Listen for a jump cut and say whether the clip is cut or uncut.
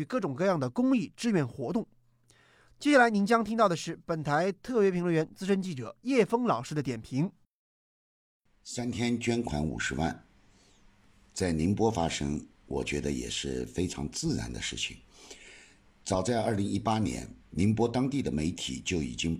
cut